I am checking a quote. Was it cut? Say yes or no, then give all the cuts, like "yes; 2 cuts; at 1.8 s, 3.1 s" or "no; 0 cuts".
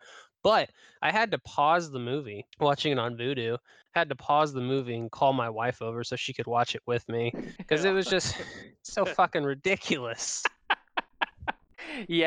yes; 1 cut; at 2.5 s